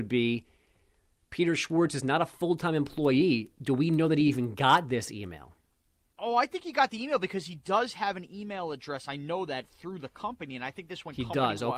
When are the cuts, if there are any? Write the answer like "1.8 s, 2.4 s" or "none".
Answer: none

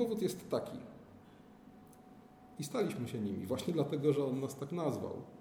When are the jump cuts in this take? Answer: 2.6 s

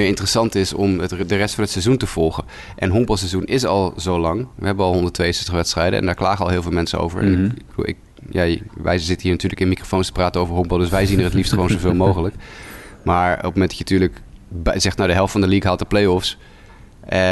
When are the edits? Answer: none

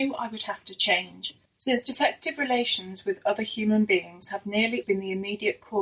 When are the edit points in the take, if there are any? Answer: 1.5 s, 4.8 s

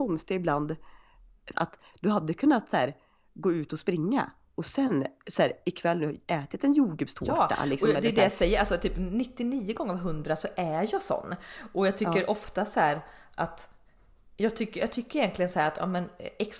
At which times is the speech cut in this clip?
1.5 s

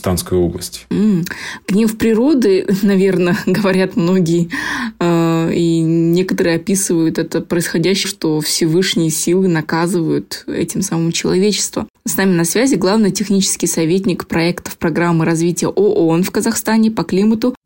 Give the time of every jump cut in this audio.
8.0 s, 11.9 s

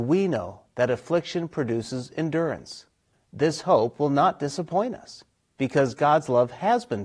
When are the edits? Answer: 3.1 s

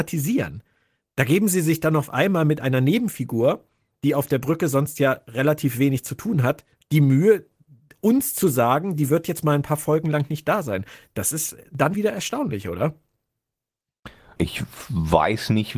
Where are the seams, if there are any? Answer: 11.9 s, 14.4 s

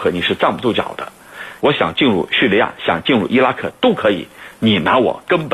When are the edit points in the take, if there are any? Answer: 1.6 s

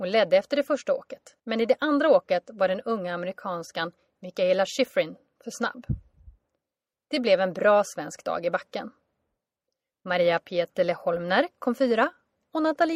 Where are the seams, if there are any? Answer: 1.4 s

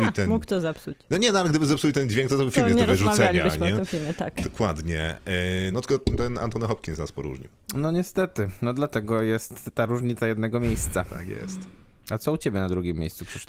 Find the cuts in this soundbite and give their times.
5.7 s

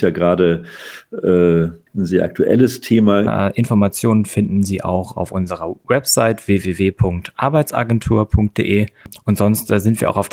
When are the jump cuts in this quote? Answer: 1.9 s, 3.3 s

